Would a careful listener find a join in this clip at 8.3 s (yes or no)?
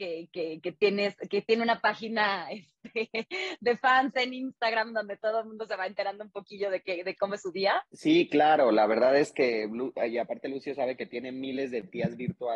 no